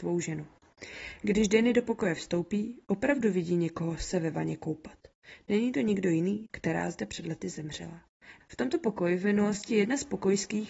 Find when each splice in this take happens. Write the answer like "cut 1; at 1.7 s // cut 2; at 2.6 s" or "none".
cut 1; at 6.4 s // cut 2; at 8.4 s